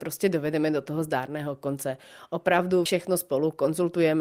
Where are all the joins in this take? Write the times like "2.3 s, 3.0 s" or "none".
none